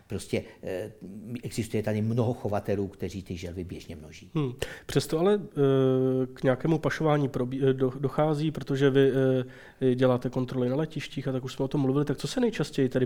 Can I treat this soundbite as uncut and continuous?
yes; 0 cuts

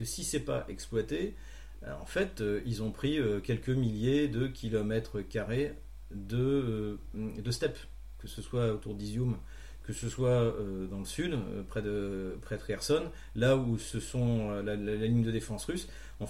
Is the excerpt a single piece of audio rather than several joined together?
yes; 0 cuts

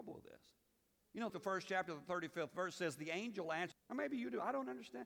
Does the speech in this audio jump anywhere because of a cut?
yes; 2 cuts; at 1.3 s, 3.7 s

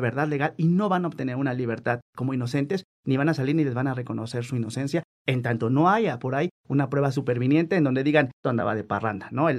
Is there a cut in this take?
yes; 1 cut; at 8.4 s

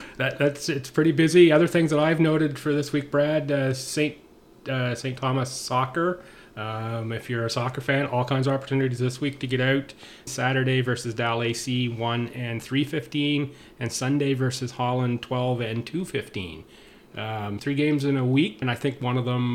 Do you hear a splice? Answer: yes; 3 cuts; at 10.3 s, 17.6 s, 18.6 s

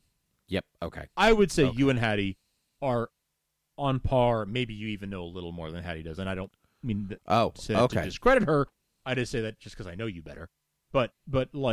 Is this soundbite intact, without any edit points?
yes; 0 cuts

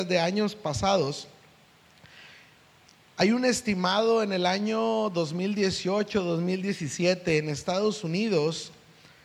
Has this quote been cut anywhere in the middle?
no; 0 cuts

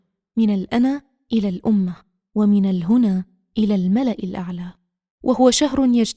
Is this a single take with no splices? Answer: yes; 0 cuts

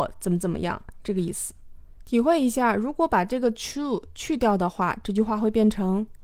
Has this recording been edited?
no; 0 cuts

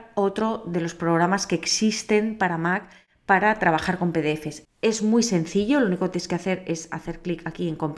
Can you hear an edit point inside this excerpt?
yes; 1 cut; at 4.6 s

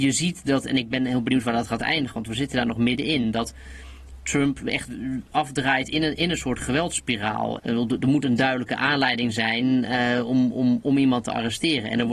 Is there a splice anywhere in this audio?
yes; 1 cut; at 7.6 s

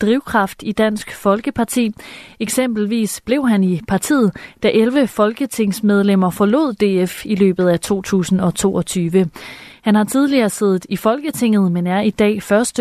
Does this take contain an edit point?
no; 0 cuts

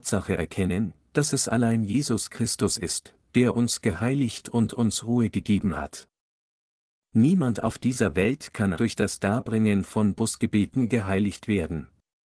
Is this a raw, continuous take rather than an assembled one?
no; 1 cut; at 8.7 s

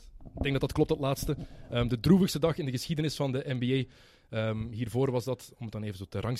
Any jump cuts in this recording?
no; 0 cuts

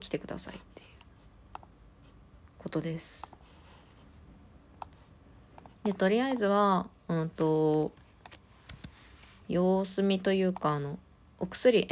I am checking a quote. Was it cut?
yes; 2 cuts; at 5.8 s, 9.4 s

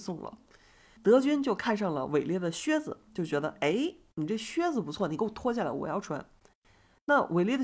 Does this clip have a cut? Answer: yes; 1 cut; at 1.0 s

